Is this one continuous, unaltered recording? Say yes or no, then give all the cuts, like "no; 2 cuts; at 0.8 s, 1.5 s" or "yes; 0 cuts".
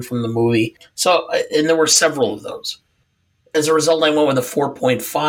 yes; 0 cuts